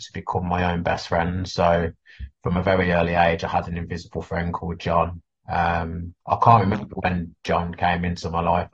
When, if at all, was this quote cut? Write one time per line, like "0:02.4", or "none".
none